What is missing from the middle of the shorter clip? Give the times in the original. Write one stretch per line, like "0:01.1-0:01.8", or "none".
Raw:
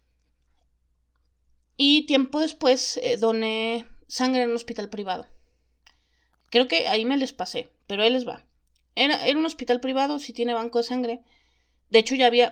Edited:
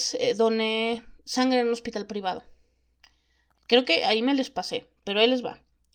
none